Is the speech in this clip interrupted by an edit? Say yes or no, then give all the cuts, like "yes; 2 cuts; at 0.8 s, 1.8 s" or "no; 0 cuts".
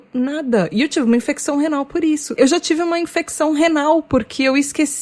yes; 1 cut; at 2.4 s